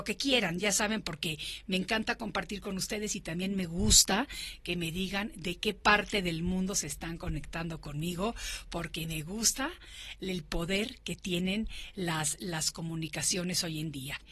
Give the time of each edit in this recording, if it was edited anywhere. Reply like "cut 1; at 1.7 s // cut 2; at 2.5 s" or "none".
none